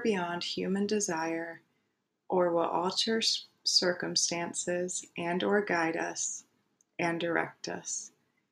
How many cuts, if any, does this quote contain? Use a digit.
0